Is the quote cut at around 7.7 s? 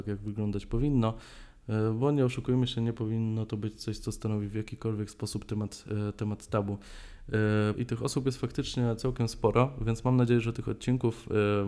yes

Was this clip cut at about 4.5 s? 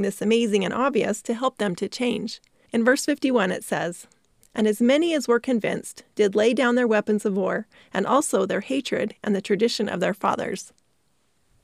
no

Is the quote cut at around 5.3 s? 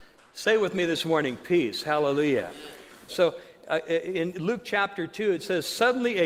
no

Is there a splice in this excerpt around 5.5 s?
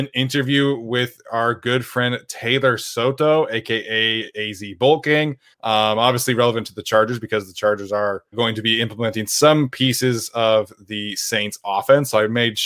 yes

